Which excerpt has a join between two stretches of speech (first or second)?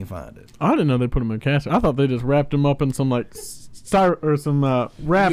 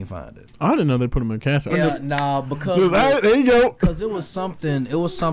second